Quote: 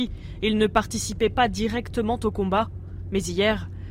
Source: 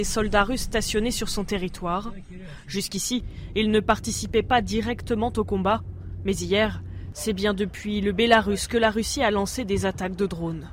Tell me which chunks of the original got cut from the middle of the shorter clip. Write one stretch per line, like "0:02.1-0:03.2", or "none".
none